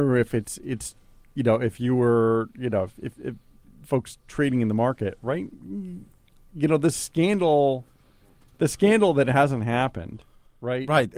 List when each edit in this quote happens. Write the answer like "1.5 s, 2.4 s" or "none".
none